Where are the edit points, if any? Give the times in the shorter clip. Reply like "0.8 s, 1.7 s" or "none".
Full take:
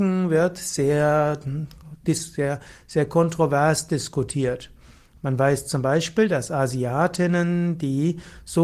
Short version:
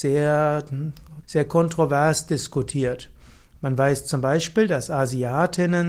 1.2 s